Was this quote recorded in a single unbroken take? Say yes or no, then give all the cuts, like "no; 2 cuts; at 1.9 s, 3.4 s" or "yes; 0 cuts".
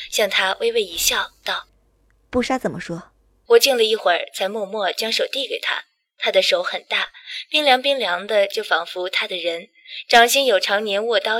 no; 1 cut; at 3.5 s